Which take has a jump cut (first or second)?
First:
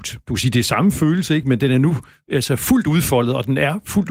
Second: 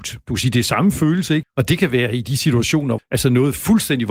second